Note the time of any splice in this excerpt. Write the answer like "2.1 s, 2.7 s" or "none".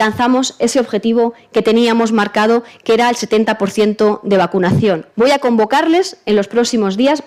5.1 s